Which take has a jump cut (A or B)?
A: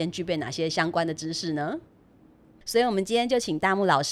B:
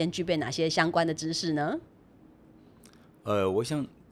A